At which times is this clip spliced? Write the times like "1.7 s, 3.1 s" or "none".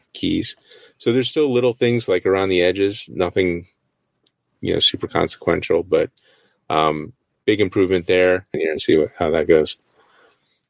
8.5 s